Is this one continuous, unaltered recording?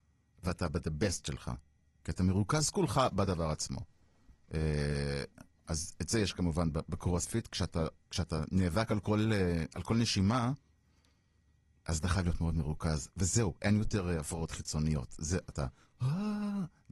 yes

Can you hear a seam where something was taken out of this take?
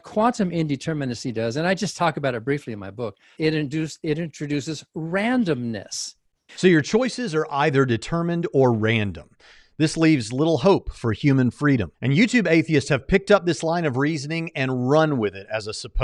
yes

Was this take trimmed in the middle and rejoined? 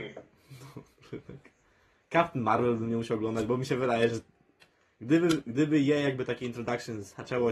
no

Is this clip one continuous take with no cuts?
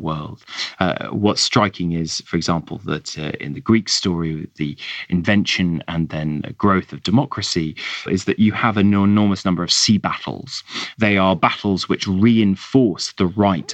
no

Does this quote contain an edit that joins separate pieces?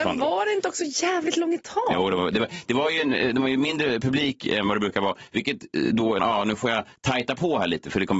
yes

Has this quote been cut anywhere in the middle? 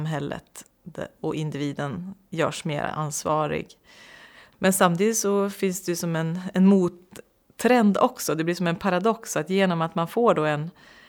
yes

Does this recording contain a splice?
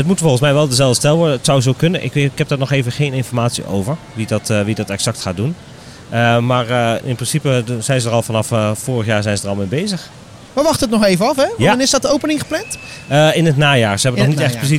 yes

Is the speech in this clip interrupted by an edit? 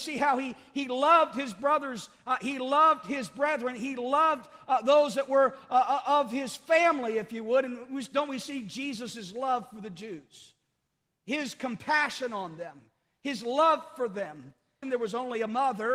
yes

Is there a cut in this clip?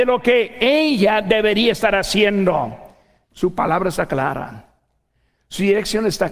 yes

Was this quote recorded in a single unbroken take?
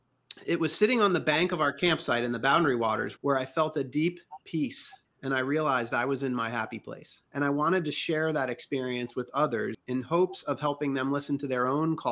no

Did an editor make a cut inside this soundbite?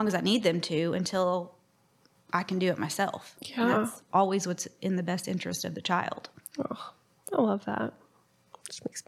no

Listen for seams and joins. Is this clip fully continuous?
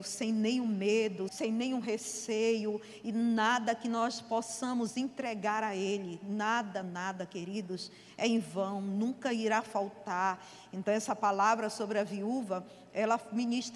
no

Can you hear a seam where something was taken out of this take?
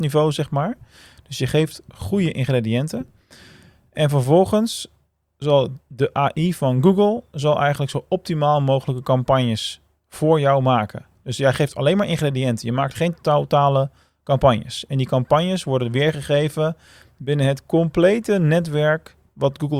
no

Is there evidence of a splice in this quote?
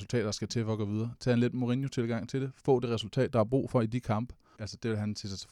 yes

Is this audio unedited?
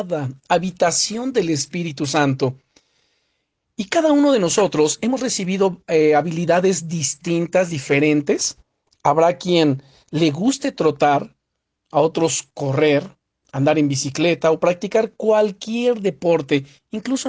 yes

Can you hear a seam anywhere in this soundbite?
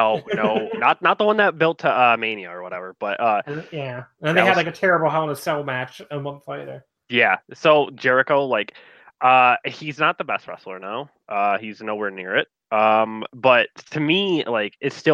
no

